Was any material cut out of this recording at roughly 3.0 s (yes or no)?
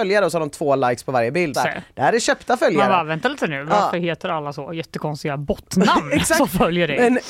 no